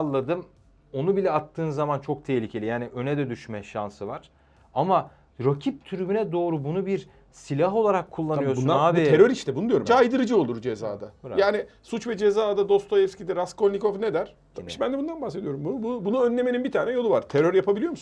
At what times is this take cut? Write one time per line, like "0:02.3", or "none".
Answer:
0:09.8
0:14.5